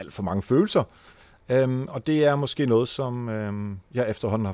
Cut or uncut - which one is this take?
uncut